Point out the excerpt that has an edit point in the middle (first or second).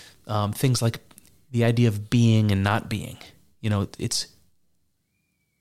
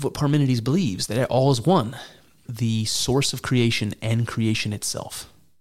second